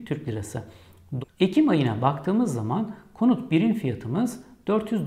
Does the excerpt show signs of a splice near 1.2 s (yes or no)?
yes